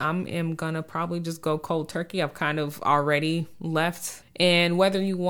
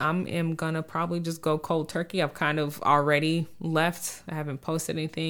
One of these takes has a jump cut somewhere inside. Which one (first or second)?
first